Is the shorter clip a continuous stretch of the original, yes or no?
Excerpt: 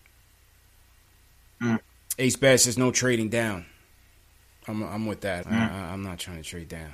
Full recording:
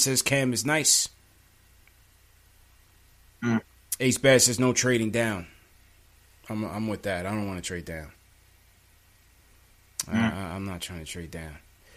no